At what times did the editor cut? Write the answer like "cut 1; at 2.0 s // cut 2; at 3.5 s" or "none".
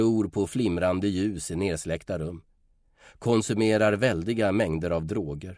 none